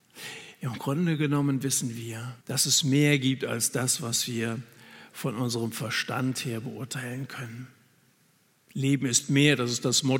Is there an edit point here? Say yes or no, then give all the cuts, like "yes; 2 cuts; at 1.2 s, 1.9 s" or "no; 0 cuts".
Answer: yes; 1 cut; at 2.4 s